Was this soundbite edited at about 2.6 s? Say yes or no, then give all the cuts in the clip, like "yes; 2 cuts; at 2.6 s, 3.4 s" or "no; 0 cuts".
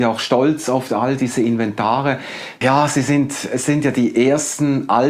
yes; 1 cut; at 2.6 s